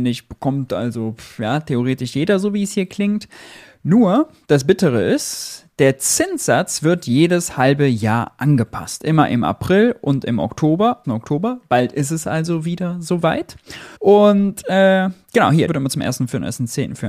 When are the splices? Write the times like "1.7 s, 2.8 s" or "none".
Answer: 11.0 s, 14.0 s, 15.7 s